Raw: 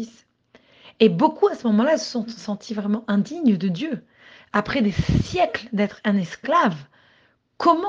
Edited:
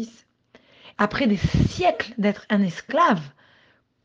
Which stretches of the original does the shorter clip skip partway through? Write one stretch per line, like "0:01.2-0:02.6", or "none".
0:00.9-0:04.5